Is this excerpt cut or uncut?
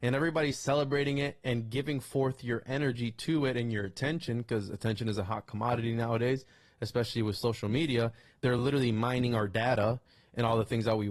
uncut